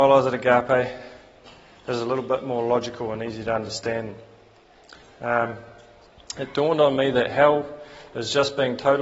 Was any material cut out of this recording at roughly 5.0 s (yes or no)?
yes